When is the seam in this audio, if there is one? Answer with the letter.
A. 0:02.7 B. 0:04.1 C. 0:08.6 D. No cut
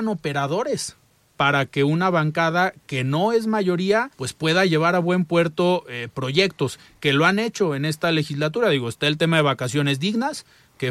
B